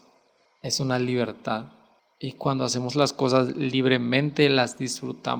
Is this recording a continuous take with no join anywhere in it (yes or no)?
yes